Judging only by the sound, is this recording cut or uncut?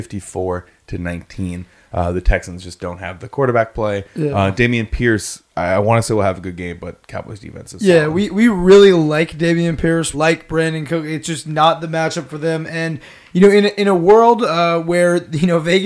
cut